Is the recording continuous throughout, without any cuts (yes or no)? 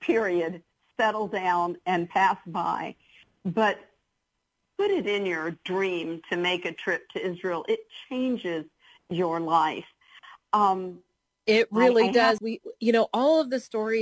no